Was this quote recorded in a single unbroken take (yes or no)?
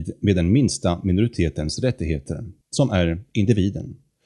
no